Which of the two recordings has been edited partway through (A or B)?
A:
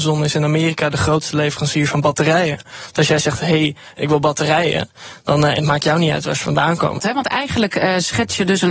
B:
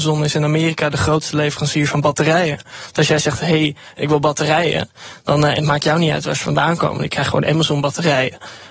A